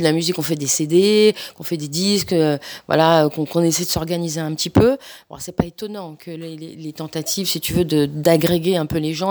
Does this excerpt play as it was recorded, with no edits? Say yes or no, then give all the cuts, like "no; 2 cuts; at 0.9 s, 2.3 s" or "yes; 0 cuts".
yes; 0 cuts